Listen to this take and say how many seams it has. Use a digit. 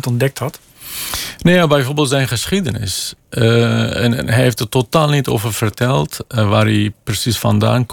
0